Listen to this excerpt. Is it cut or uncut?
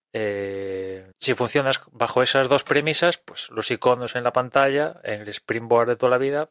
cut